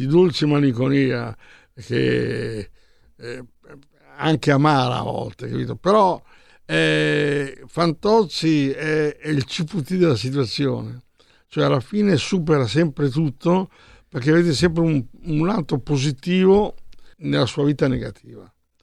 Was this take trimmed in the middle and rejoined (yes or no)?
yes